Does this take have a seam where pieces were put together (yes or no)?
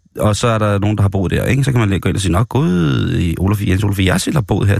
no